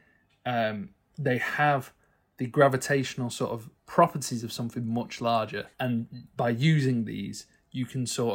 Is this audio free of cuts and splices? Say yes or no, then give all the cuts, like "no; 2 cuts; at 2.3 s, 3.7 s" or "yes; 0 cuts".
no; 2 cuts; at 3.8 s, 5.7 s